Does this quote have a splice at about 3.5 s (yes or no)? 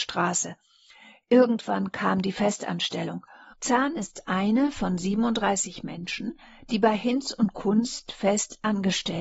yes